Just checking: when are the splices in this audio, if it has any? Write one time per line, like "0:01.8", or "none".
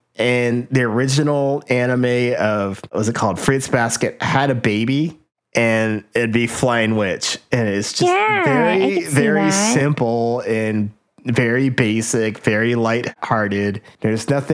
none